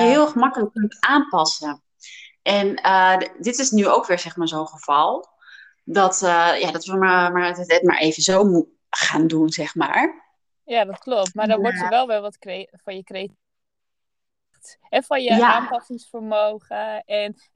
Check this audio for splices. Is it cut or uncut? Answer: uncut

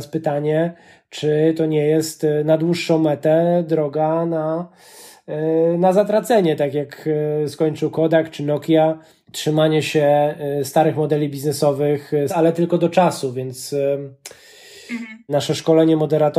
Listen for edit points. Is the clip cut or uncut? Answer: cut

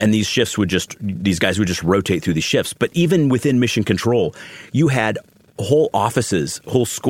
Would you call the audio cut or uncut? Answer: uncut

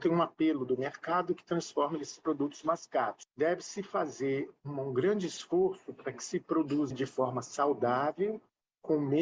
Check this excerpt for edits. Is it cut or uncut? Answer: uncut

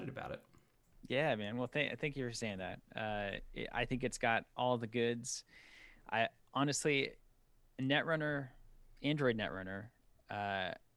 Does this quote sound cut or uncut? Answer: uncut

